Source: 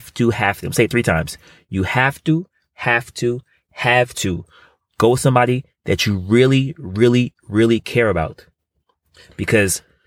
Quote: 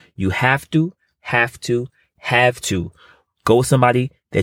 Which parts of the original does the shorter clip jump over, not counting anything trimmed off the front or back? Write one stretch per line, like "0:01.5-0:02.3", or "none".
none